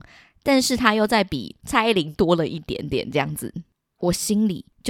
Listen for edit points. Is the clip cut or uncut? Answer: cut